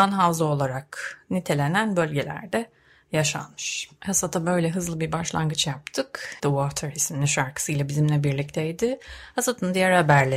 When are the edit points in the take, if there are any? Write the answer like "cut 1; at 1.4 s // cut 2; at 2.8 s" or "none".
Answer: cut 1; at 4.0 s // cut 2; at 6.4 s